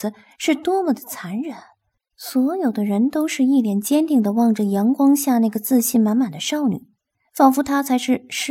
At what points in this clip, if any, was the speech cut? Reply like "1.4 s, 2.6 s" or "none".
2.0 s